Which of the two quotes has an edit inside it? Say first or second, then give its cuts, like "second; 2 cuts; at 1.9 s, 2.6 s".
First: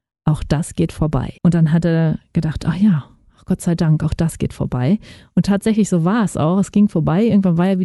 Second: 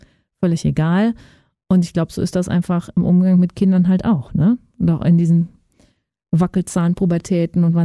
first; 1 cut; at 1.4 s